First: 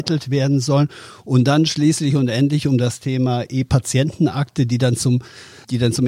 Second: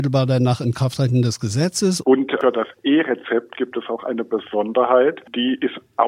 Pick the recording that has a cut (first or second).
second